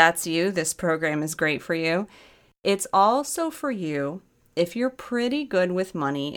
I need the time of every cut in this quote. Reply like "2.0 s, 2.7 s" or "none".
none